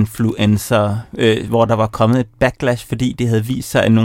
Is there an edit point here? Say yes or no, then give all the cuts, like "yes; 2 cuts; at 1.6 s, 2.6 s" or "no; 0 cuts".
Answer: no; 0 cuts